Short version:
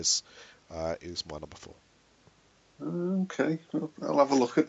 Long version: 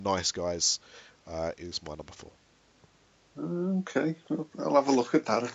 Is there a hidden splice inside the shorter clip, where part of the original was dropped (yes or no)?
no